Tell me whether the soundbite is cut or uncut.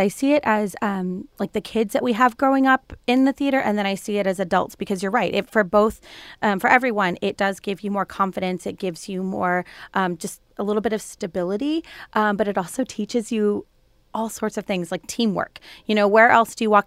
uncut